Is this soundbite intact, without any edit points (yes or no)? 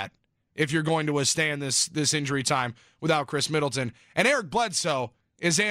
yes